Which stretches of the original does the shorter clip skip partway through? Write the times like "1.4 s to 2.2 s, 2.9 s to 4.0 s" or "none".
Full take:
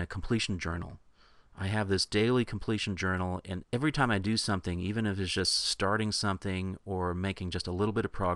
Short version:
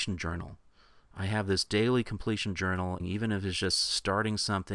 3.4 s to 4.7 s